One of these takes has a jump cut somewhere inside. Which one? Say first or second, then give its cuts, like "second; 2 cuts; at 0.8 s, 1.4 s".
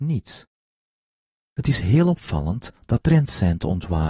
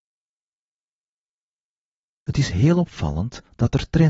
first; 2 cuts; at 1.5 s, 3.0 s